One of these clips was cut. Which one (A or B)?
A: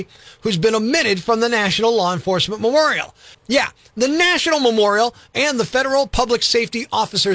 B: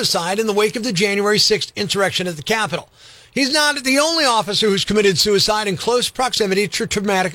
A